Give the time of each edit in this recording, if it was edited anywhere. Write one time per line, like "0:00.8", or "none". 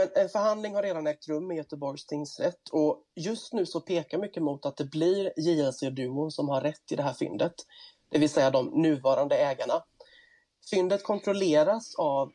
none